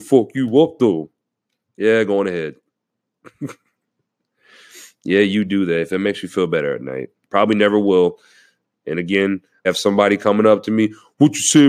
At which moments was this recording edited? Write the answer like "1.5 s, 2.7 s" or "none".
7.3 s, 9.6 s